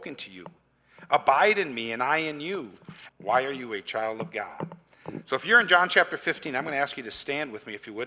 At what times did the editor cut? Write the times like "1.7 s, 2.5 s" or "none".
3.1 s